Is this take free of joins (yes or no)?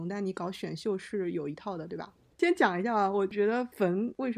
no